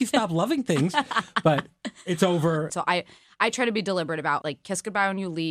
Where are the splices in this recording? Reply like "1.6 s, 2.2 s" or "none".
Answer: 2.7 s, 4.4 s